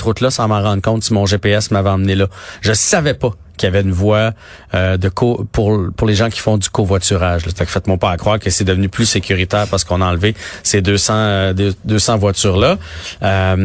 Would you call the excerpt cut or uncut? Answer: cut